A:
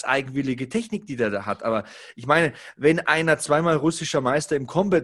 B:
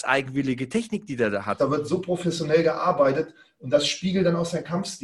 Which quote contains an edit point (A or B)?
B